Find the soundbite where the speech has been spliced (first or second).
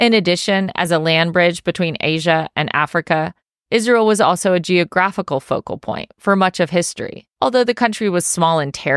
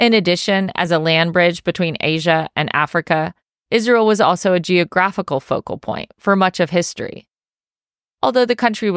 first